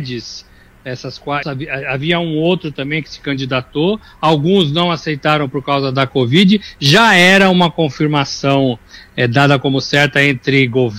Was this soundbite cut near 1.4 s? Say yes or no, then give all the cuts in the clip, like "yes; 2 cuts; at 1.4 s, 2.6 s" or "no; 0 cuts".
yes; 1 cut; at 1.4 s